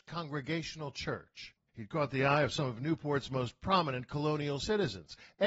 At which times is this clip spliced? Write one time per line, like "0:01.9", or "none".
0:01.7